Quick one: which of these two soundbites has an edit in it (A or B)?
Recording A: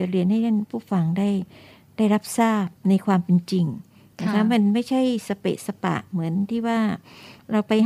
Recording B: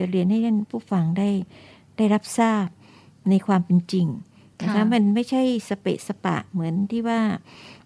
A